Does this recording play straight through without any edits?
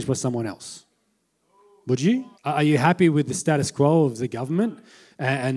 no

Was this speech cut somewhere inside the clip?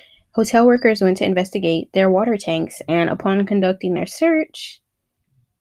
no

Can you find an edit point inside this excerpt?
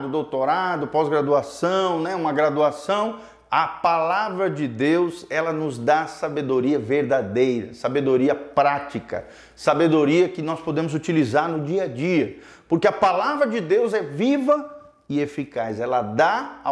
no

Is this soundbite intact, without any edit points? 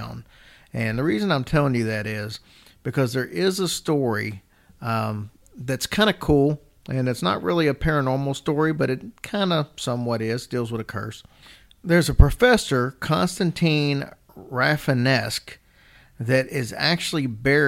yes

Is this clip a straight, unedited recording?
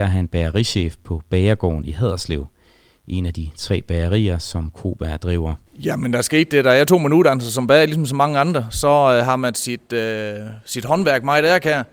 no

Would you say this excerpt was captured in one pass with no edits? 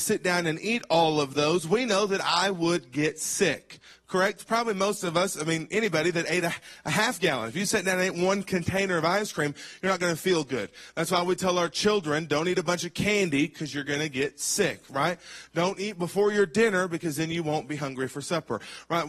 yes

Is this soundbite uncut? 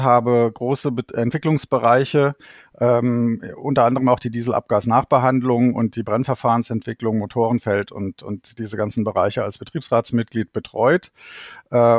yes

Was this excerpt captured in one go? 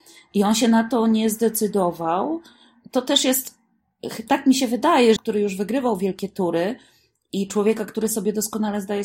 no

